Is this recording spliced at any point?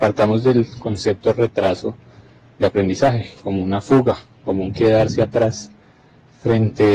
no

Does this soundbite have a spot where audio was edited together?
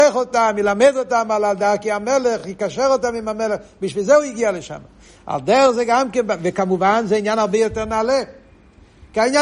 no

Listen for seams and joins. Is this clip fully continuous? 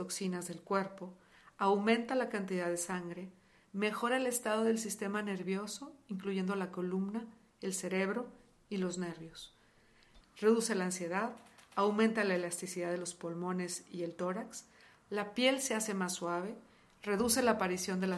no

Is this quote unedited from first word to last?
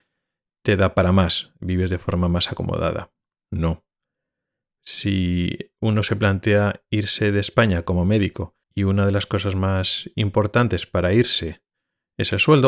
no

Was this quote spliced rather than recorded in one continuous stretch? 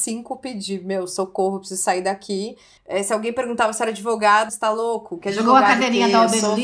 yes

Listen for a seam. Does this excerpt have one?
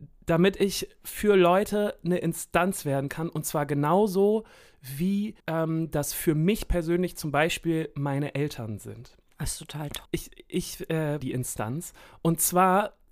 yes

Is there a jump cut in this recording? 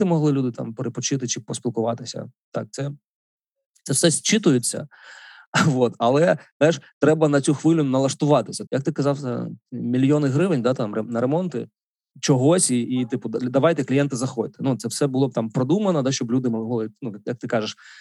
yes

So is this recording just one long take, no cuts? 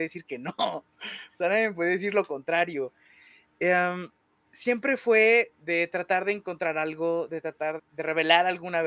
no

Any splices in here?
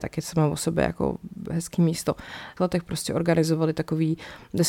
yes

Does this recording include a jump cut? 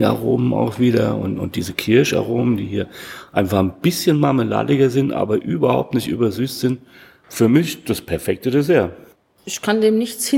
no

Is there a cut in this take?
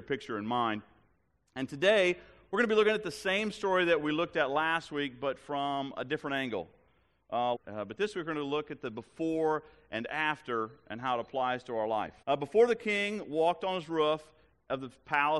yes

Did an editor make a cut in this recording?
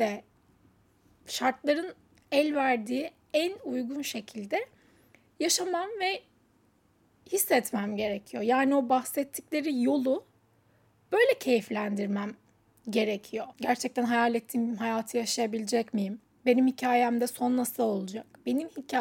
yes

